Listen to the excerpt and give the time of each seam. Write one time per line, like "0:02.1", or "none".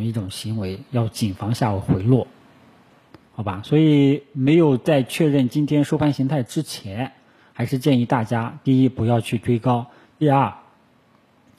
none